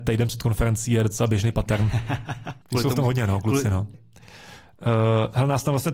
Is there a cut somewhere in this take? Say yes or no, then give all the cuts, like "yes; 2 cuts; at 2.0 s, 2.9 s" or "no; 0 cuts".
yes; 2 cuts; at 2.6 s, 3.9 s